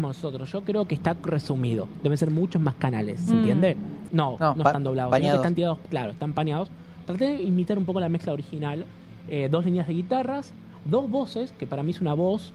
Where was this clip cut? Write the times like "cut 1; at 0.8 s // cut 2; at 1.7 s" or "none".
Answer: cut 1; at 4.1 s